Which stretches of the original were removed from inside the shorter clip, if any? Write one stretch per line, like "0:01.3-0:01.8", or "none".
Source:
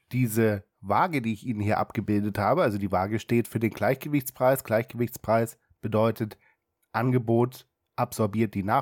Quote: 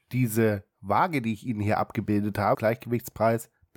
0:02.5-0:04.6